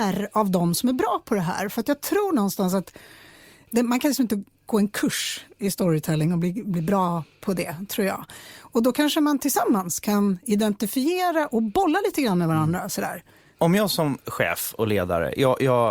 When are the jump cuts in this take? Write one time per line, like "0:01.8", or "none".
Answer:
none